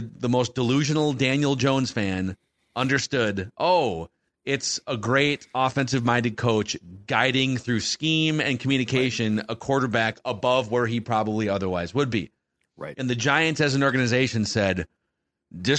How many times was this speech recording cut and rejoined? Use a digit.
0